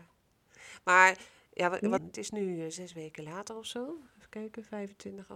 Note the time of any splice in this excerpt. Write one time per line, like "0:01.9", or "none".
0:02.0